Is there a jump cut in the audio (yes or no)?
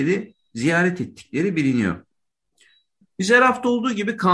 yes